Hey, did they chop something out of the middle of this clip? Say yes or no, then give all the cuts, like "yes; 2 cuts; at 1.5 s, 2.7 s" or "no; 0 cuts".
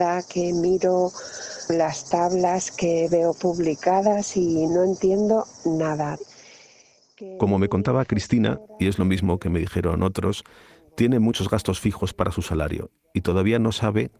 no; 0 cuts